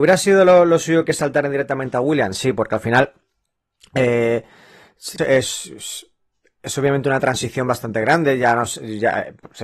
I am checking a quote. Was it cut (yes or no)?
yes